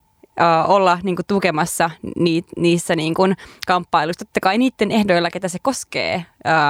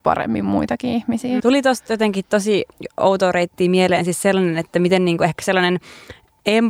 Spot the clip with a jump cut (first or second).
second